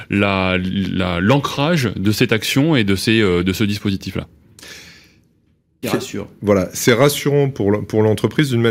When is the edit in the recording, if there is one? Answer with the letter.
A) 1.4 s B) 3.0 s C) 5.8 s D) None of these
C